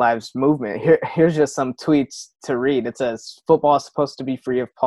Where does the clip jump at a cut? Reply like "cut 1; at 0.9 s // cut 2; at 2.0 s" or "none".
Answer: none